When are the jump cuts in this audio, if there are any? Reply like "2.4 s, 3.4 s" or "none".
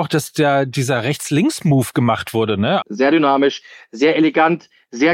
2.8 s